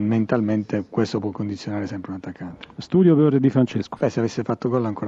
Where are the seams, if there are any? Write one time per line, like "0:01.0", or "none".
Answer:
0:04.0